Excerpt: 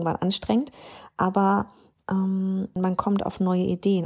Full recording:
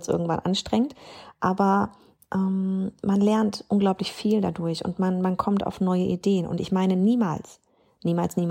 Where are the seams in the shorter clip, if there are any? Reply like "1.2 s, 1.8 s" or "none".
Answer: 2.8 s